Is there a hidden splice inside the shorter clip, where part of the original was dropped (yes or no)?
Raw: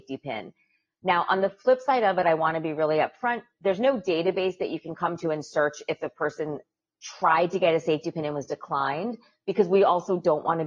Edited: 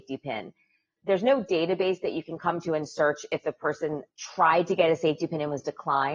yes